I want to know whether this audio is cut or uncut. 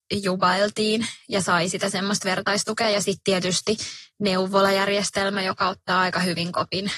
uncut